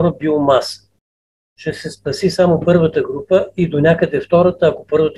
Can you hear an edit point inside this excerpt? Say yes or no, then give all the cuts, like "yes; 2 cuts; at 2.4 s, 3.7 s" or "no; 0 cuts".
no; 0 cuts